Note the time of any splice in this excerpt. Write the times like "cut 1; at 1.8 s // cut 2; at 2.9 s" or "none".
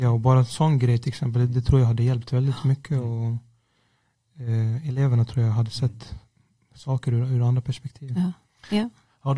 none